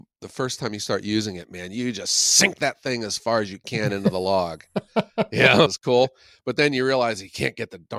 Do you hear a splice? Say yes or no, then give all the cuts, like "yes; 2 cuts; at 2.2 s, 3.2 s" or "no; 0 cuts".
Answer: yes; 1 cut; at 5.7 s